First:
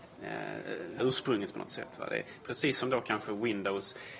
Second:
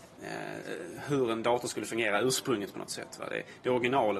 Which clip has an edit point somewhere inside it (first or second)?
first